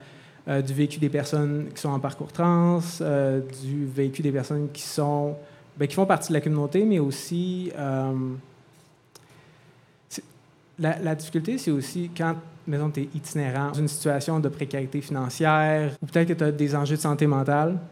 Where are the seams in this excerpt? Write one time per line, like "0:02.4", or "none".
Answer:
0:13.7
0:16.0

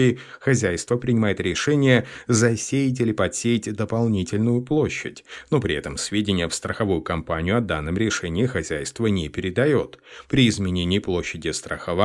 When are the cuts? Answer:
none

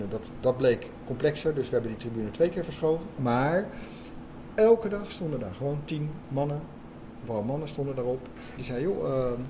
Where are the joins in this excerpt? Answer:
0:08.6

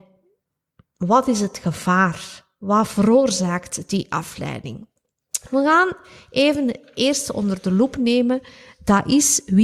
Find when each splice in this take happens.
none

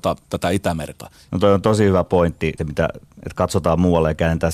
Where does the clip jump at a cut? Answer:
0:01.3
0:02.6

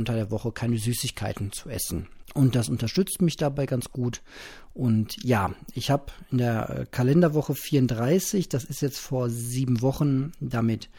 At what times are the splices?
0:02.2

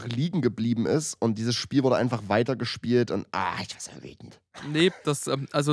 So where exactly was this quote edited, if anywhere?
none

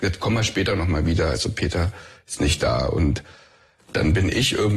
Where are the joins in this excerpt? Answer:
none

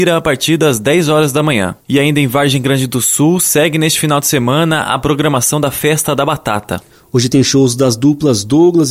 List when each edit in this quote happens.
none

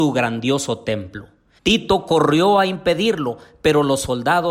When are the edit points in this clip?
0:01.6

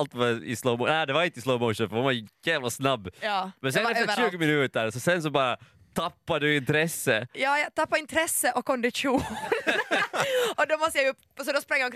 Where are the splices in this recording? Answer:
none

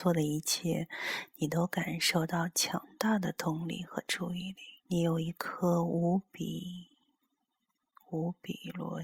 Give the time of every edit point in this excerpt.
0:04.8

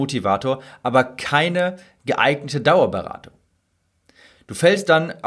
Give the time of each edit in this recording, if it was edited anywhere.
none

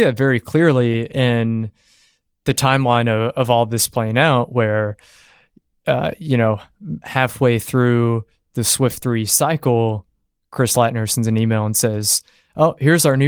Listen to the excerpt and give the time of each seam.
none

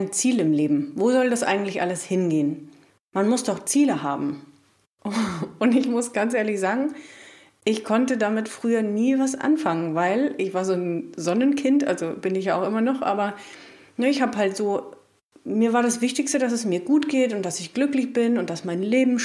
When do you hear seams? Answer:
0:02.9

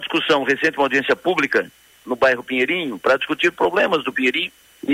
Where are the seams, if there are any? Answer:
0:02.0

